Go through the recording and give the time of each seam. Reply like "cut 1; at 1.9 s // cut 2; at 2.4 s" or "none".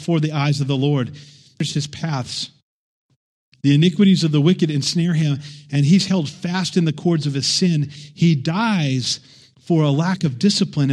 none